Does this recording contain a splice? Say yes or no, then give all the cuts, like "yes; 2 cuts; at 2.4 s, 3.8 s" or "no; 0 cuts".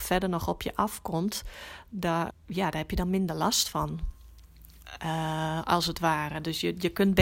yes; 1 cut; at 2.3 s